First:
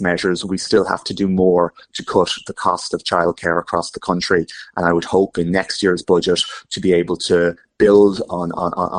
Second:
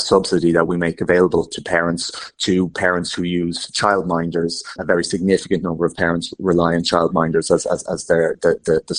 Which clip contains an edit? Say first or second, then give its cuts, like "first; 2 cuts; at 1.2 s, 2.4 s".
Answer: second; 1 cut; at 4.8 s